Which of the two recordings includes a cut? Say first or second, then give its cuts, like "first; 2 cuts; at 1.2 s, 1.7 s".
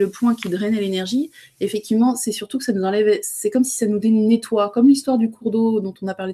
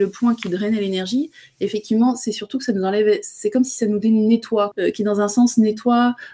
second; 1 cut; at 4.7 s